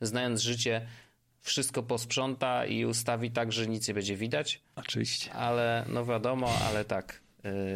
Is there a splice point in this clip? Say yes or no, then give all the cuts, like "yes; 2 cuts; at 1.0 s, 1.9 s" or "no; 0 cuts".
no; 0 cuts